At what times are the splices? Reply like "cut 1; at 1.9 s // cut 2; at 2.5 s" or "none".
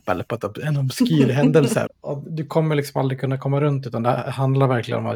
cut 1; at 1.9 s